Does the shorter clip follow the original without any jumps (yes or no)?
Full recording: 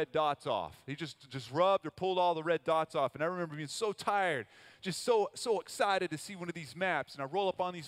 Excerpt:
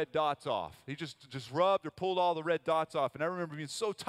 yes